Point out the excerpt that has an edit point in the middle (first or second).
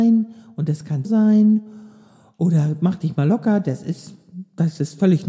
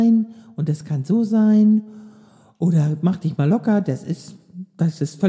first